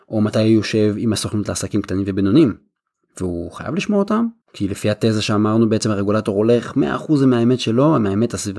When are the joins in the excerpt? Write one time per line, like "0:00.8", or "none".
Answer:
0:04.4